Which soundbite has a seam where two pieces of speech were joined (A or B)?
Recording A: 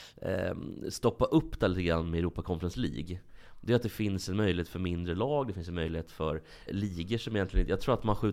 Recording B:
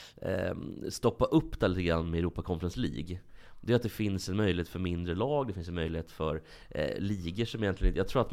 A